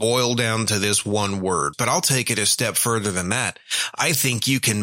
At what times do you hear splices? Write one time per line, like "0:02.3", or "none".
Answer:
0:01.7